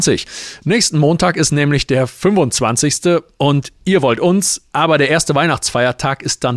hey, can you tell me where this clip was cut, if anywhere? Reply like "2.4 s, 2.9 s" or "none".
4.7 s